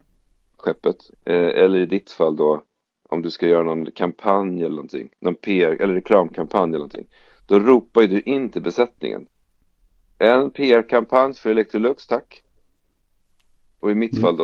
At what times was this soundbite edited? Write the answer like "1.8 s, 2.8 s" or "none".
1.1 s